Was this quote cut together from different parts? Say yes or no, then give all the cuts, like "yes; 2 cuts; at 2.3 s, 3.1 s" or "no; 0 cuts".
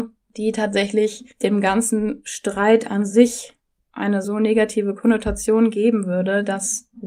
no; 0 cuts